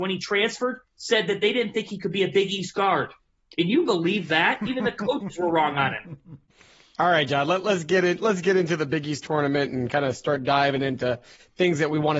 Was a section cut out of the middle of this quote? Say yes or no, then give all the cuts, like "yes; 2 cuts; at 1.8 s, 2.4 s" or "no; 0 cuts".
no; 0 cuts